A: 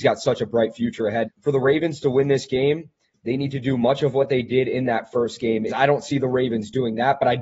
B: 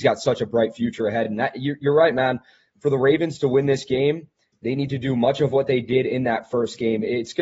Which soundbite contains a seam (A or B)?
A